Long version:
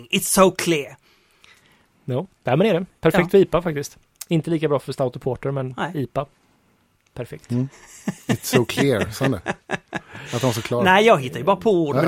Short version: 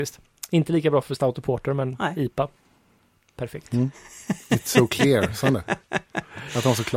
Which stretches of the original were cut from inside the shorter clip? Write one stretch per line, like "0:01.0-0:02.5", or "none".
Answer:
none